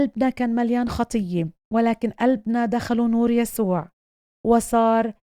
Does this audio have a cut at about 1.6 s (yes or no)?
yes